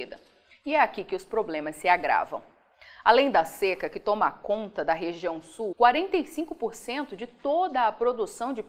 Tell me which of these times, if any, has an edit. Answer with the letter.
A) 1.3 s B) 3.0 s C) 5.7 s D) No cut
C